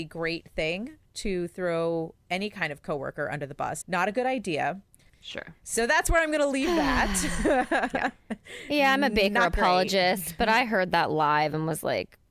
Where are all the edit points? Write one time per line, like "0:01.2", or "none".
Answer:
0:03.8
0:05.1